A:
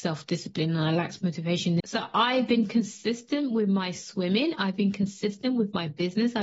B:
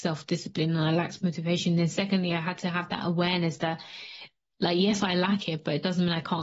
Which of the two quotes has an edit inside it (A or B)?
A